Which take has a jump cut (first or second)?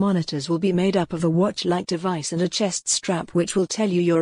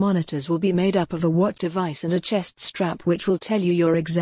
second